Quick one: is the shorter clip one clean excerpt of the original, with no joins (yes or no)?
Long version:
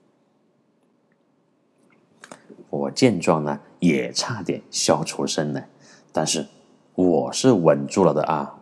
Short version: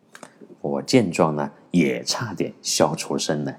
yes